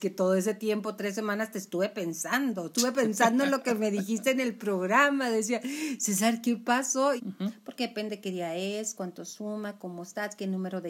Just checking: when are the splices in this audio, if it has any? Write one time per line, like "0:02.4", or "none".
0:07.2
0:08.9